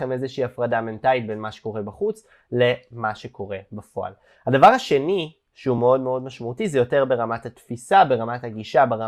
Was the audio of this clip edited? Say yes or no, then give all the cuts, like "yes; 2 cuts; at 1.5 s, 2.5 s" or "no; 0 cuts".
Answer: no; 0 cuts